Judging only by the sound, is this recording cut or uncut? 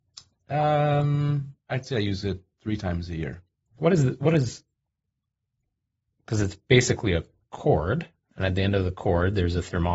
cut